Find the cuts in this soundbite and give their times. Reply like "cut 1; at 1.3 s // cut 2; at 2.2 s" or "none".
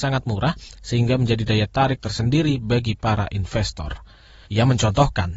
cut 1; at 4.4 s